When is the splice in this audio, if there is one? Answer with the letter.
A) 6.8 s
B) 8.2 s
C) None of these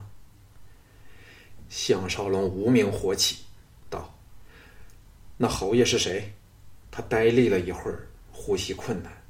A